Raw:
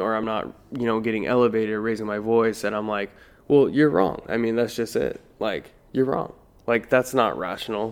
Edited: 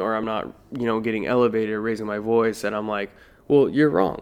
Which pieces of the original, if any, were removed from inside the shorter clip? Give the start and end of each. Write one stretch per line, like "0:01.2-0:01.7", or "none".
none